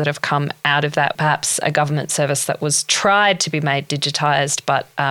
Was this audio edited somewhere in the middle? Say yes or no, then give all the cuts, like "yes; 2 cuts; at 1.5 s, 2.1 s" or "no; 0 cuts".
yes; 1 cut; at 1.1 s